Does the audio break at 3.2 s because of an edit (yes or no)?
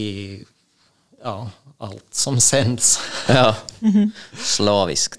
no